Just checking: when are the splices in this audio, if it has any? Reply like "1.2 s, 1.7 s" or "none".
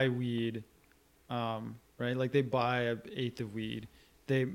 1.9 s